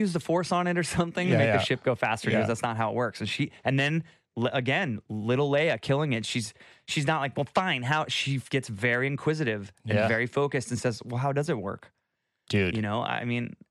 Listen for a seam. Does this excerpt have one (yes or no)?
no